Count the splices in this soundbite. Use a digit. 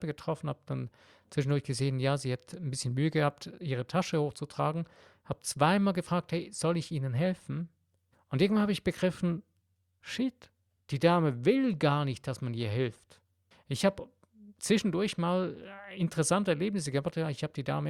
2